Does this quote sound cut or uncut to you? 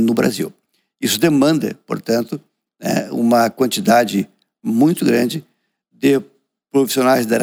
uncut